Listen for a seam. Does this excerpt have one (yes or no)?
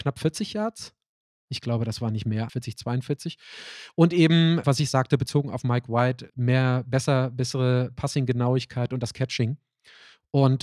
yes